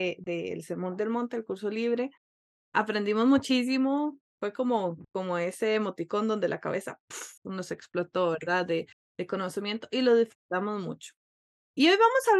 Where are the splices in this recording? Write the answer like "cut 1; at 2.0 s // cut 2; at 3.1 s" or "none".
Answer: none